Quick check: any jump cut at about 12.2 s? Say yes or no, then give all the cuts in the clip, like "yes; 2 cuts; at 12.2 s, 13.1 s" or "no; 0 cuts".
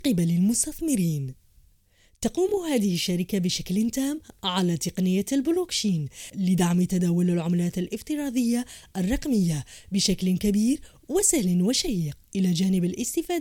yes; 1 cut; at 12.2 s